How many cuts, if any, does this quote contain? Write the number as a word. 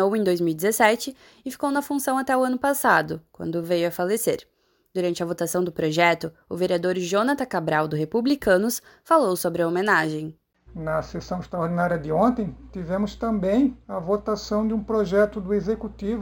two